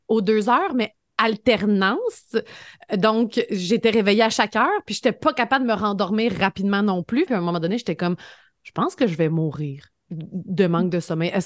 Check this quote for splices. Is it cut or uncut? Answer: cut